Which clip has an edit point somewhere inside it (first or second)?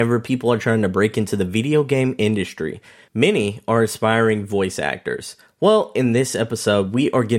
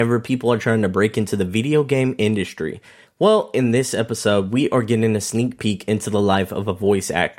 second